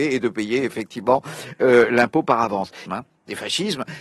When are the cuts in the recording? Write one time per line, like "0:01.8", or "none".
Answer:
0:02.9